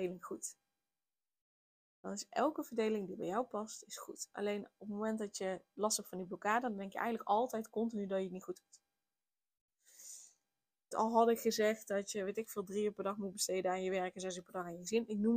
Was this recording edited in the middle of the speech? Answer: yes; 1 cut; at 10.9 s

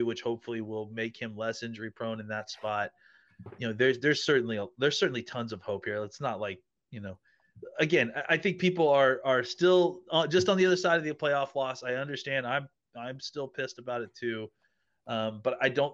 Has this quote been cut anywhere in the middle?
no; 0 cuts

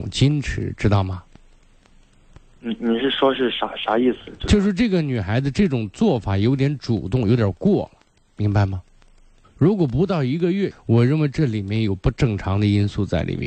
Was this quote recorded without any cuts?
no; 2 cuts; at 9.4 s, 10.7 s

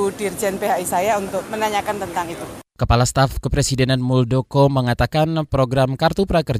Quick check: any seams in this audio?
yes; 1 cut; at 2.7 s

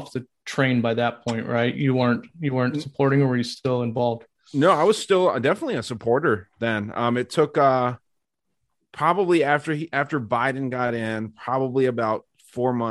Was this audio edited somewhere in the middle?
no; 0 cuts

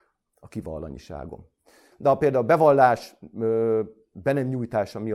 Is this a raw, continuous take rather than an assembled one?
no; 1 cut; at 1.9 s

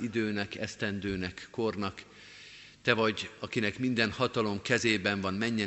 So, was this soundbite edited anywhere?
no; 0 cuts

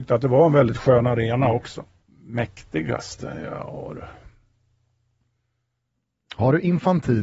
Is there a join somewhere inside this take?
yes; 1 cut; at 2.0 s

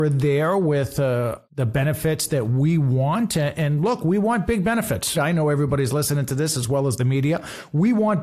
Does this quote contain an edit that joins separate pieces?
yes; 2 cuts; at 1.4 s, 5.1 s

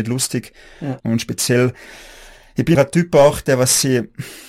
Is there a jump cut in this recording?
yes; 2 cuts; at 1.0 s, 2.8 s

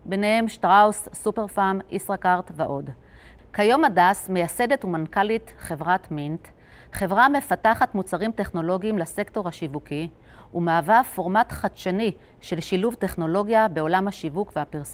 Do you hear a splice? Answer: no; 0 cuts

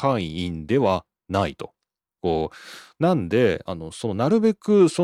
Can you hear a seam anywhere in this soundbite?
yes; 1 cut; at 2.2 s

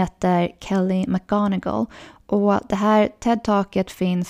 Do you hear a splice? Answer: no; 0 cuts

